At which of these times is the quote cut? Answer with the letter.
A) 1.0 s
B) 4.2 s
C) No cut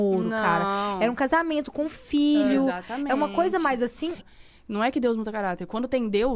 B